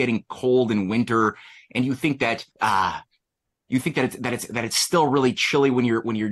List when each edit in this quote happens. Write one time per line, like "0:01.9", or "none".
0:02.5